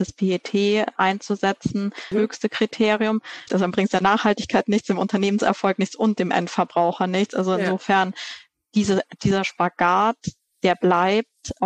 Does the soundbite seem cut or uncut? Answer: cut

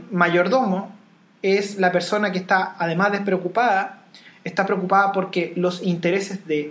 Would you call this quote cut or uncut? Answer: uncut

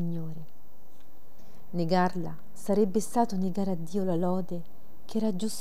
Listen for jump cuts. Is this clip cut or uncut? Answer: uncut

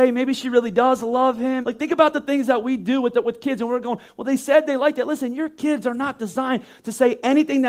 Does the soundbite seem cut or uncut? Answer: cut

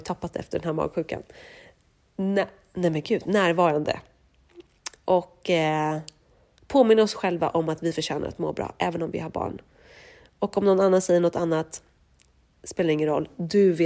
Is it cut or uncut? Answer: uncut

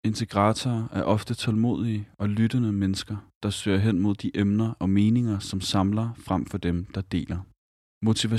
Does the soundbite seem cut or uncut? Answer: uncut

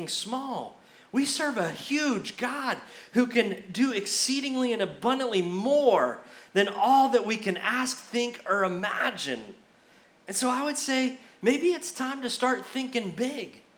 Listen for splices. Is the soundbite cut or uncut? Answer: uncut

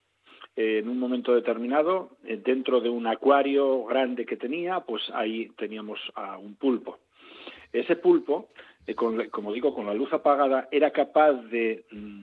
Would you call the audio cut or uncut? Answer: uncut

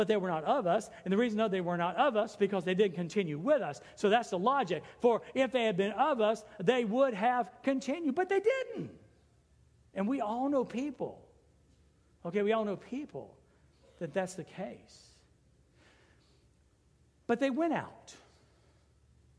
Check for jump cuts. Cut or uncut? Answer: uncut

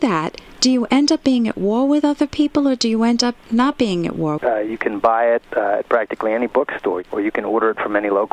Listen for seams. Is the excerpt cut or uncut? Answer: cut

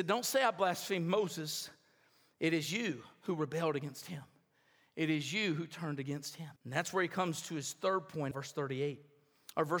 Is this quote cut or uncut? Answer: cut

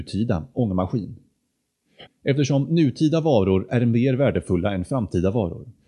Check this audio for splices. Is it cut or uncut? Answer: cut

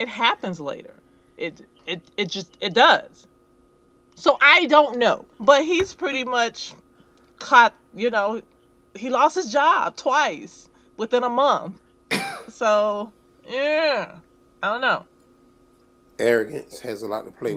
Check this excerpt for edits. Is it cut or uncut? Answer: cut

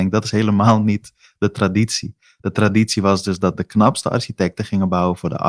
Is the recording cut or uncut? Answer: uncut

